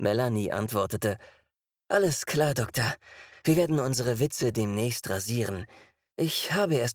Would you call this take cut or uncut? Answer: uncut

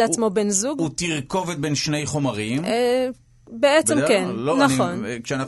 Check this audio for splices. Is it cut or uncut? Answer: uncut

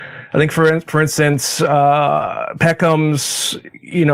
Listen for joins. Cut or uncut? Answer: uncut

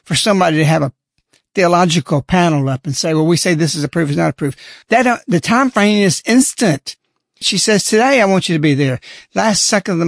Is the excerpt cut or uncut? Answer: cut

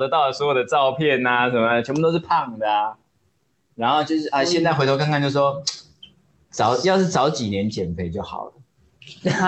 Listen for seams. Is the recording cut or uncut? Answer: uncut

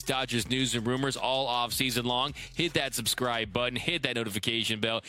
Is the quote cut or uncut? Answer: uncut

